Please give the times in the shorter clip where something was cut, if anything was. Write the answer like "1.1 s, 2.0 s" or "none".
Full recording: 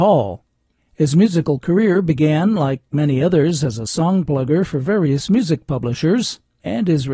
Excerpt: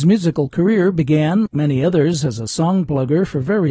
1.5 s

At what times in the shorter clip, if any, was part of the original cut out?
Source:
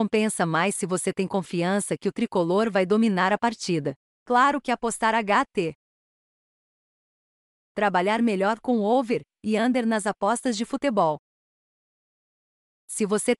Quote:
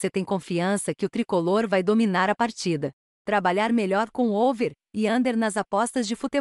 3.0 s

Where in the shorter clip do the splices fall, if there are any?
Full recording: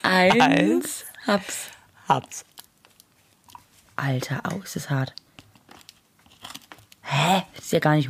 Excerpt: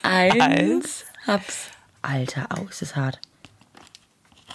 2.0 s

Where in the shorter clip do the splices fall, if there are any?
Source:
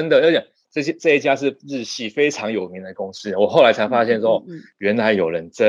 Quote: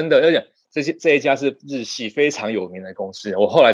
none

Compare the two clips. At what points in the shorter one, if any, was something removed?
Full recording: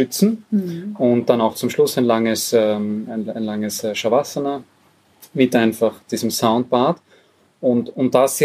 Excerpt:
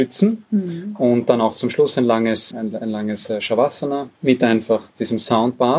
2.5 s, 4.2 s

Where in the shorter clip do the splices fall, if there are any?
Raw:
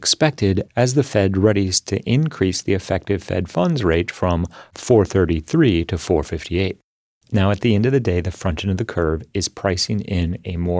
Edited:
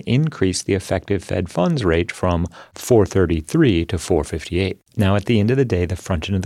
4.9 s

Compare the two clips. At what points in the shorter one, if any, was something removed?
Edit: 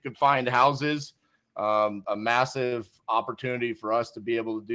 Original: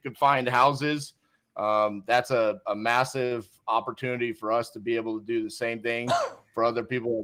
2.0 s

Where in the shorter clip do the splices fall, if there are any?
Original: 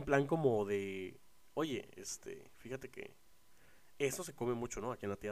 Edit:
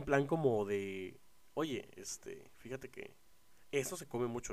3.6 s

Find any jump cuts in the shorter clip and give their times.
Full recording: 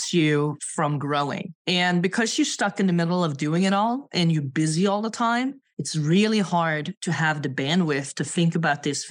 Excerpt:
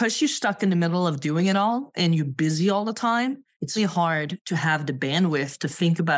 3.8 s

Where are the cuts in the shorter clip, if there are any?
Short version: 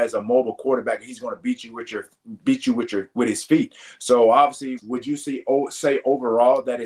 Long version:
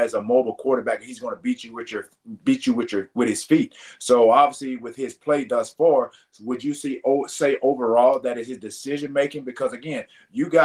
4.8 s

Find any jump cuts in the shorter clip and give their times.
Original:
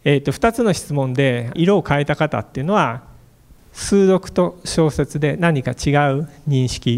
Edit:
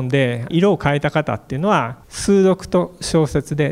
2.0 s

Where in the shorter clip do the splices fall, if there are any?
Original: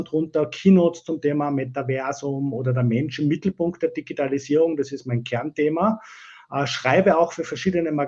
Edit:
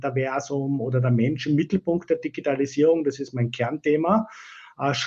none

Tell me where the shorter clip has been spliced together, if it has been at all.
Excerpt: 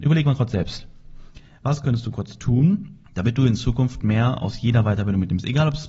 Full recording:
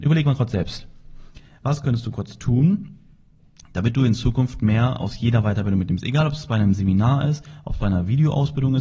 3.1 s

